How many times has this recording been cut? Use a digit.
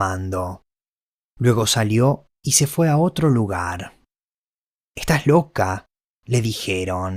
2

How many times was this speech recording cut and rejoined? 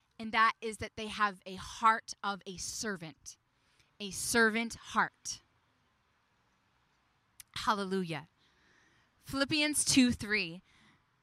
0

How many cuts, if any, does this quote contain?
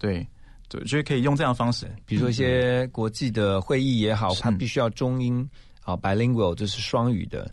2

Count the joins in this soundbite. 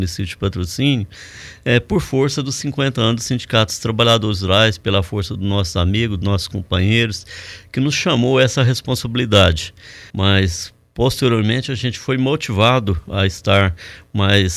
1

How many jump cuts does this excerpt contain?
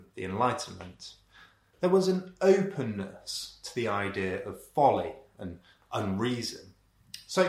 0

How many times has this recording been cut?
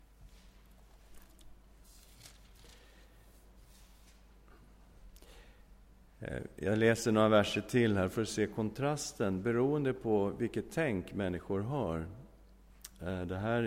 0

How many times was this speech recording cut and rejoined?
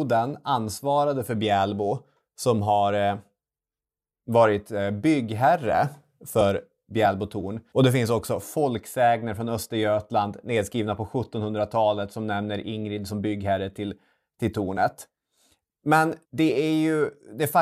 2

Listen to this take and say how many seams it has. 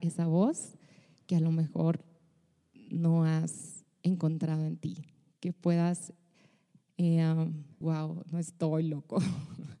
1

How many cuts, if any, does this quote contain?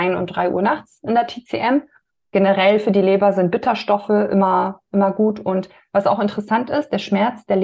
1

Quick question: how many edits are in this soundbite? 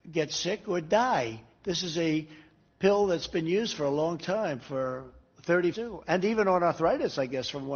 2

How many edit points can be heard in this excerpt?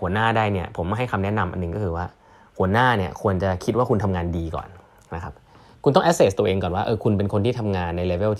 0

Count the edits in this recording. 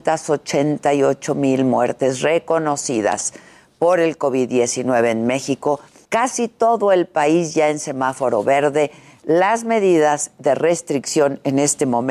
0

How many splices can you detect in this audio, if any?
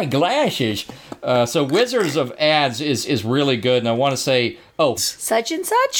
1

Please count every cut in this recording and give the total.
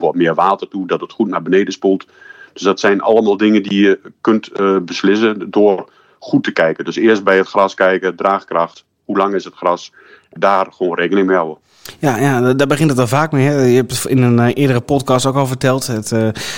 1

